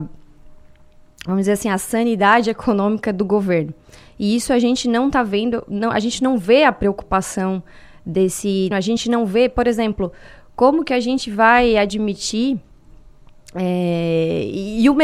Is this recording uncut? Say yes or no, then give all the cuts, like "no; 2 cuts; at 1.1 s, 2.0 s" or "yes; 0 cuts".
no; 1 cut; at 8.7 s